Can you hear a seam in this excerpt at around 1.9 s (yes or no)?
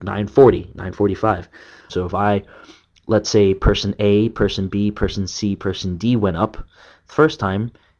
yes